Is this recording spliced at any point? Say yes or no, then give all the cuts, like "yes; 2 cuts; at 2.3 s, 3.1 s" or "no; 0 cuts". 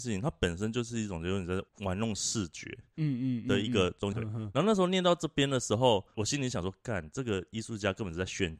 yes; 1 cut; at 4.1 s